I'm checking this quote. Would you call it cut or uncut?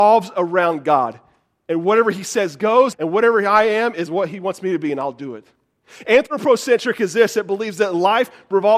cut